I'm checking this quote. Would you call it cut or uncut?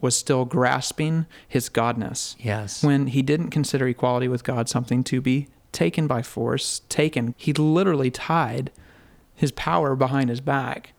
cut